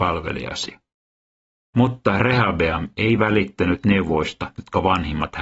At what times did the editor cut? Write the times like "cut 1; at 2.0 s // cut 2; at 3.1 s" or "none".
none